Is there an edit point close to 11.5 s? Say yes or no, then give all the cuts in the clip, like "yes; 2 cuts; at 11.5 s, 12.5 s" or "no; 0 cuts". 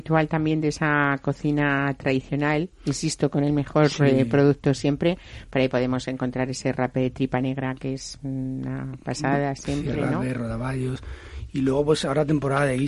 no; 0 cuts